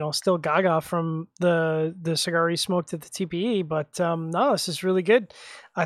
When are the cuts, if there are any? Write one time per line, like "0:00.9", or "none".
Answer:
none